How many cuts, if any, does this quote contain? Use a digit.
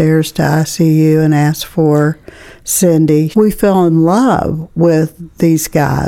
1